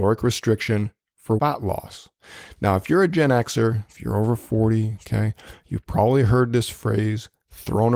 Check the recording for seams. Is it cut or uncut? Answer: uncut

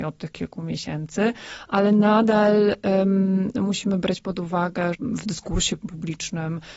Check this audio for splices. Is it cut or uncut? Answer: cut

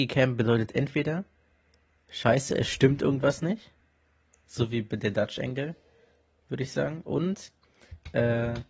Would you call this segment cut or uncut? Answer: uncut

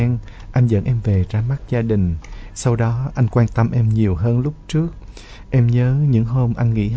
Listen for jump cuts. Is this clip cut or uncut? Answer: cut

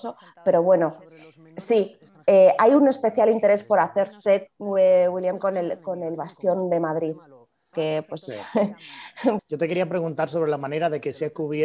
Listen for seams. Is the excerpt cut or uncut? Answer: cut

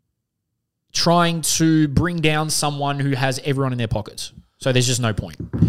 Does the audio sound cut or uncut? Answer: uncut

